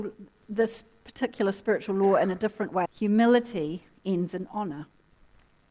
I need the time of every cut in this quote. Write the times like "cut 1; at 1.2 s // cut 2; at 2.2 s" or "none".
cut 1; at 2.8 s